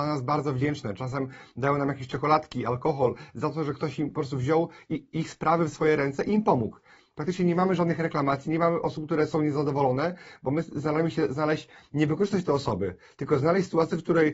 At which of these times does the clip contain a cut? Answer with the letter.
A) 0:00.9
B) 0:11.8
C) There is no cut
C